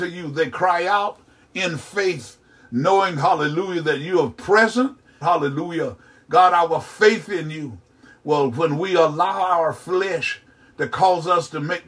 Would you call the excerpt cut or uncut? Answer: cut